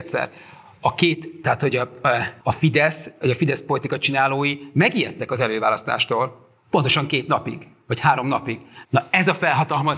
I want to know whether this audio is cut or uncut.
cut